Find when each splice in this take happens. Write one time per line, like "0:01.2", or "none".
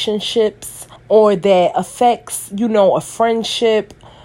0:01.0